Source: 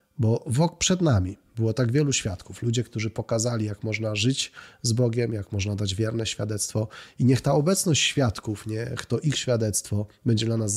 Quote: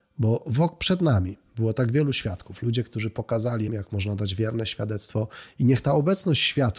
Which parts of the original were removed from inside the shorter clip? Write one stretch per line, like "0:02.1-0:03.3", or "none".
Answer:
0:03.7-0:05.3